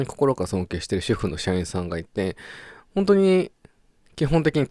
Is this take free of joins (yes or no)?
yes